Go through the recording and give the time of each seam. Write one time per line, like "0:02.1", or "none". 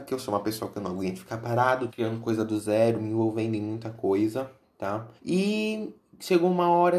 0:01.9
0:05.2